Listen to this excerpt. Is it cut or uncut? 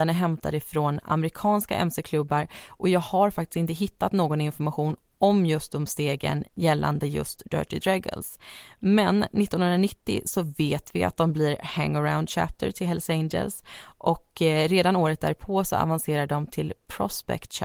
uncut